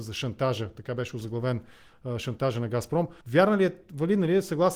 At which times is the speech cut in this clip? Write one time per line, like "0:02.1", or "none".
0:03.2